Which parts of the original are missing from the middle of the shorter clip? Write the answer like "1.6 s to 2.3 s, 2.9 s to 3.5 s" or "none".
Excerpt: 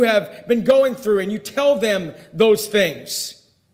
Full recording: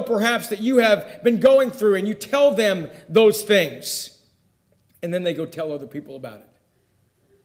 none